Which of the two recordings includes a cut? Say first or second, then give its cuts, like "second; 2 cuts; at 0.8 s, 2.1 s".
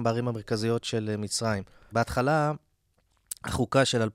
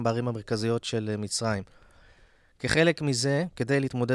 first; 1 cut; at 1.9 s